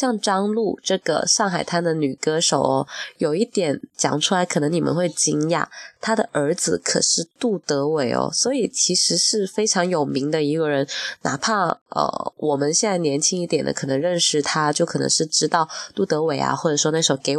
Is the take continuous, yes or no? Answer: yes